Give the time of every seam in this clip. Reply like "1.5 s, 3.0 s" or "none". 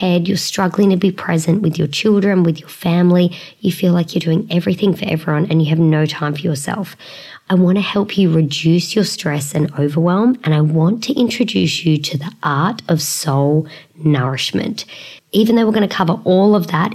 15.2 s